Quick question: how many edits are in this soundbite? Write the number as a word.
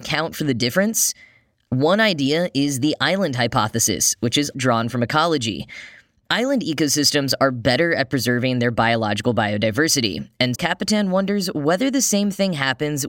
two